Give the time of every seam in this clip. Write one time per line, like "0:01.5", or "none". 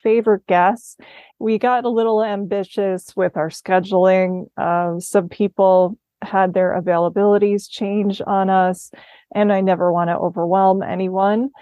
0:01.3